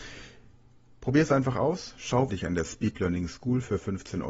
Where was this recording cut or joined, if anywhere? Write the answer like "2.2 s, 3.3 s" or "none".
2.3 s